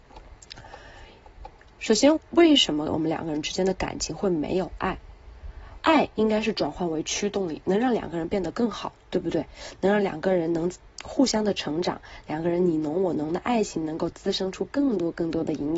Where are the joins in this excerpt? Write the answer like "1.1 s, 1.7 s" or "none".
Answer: 2.2 s, 5.8 s